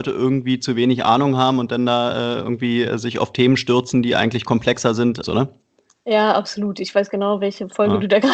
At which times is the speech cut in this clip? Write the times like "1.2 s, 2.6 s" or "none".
5.2 s